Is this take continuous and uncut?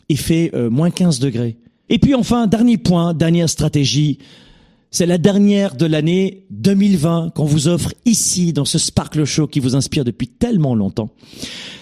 no; 1 cut; at 1.9 s

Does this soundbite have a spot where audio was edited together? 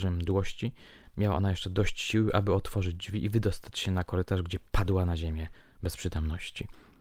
no; 0 cuts

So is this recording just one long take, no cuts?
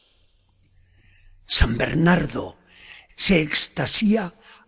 no; 1 cut; at 3.1 s

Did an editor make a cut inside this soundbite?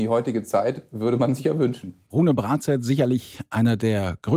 no; 0 cuts

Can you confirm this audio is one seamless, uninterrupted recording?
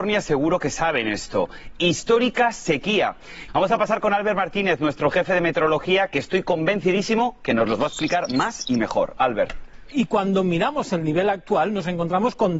no; 2 cuts; at 3.5 s, 9.9 s

